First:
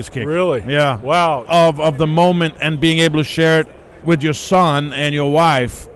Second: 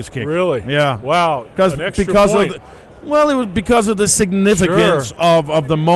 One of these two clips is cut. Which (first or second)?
first